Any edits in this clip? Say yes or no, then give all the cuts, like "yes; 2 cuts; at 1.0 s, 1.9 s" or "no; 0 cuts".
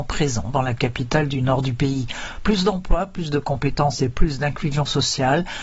no; 0 cuts